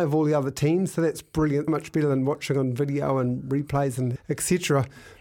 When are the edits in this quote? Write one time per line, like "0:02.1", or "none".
0:01.7
0:04.2